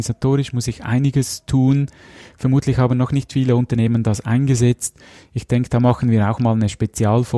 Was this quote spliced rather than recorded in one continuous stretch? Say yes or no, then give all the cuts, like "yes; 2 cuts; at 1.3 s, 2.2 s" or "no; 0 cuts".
no; 0 cuts